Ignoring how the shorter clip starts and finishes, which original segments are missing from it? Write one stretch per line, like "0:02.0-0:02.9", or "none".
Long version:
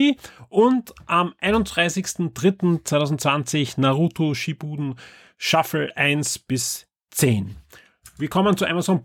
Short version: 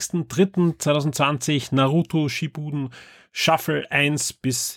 none